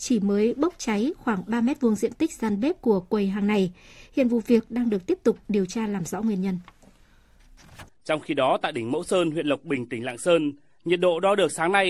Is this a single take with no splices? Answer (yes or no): no